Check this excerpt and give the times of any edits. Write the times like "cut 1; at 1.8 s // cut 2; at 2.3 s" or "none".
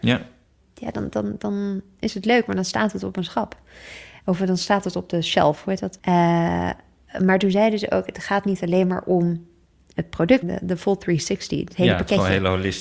cut 1; at 6.0 s // cut 2; at 10.4 s